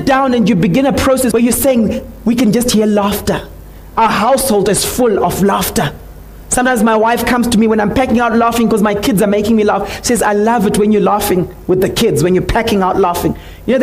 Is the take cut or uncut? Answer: cut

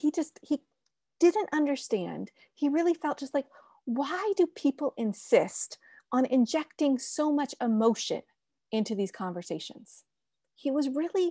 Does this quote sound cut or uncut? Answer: uncut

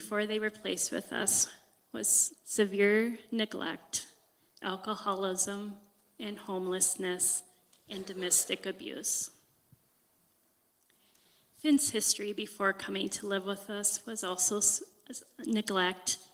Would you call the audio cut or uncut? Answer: uncut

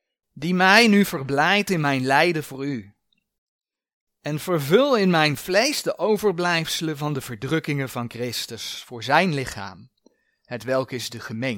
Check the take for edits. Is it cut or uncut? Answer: uncut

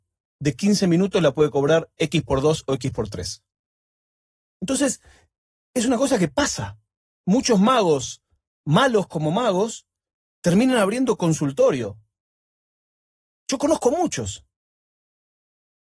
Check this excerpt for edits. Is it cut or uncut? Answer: uncut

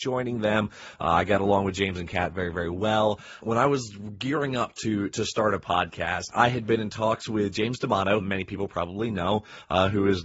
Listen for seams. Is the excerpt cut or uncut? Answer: cut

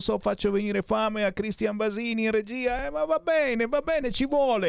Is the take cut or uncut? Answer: uncut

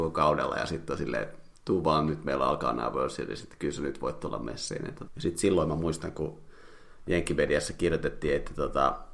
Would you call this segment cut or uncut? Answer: cut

